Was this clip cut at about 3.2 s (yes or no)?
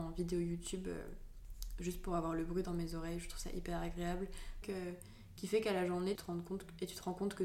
no